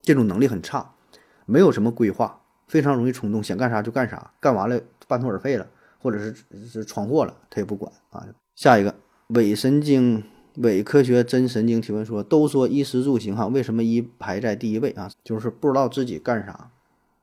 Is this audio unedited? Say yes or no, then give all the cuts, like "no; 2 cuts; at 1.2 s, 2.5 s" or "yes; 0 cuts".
no; 2 cuts; at 8.4 s, 15.1 s